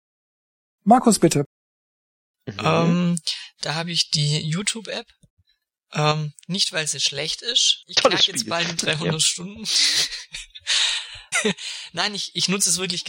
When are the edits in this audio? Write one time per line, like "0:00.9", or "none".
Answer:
0:11.3